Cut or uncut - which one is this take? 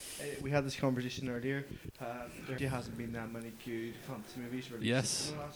cut